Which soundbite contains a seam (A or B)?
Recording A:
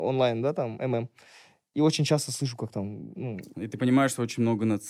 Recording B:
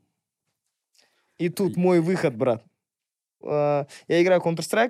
B